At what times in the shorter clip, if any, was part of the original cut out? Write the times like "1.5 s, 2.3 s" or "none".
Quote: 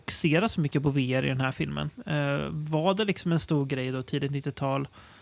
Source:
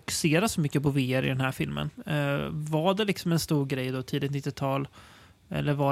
none